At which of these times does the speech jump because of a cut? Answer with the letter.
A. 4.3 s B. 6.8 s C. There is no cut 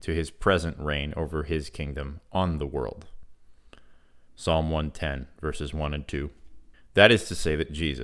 A